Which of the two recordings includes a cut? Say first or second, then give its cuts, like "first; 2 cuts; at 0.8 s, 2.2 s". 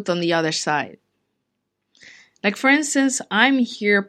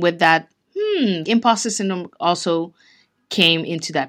second; 1 cut; at 1.2 s